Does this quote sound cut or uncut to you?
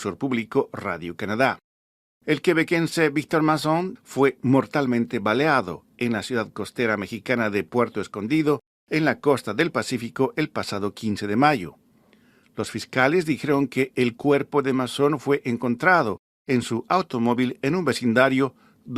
cut